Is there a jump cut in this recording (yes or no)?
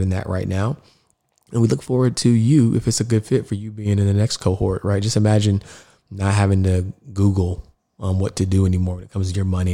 no